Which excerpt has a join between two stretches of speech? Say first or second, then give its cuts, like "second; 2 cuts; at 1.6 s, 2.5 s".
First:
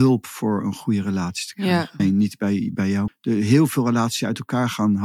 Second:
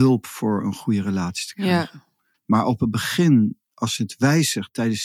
first; 2 cuts; at 2.0 s, 3.1 s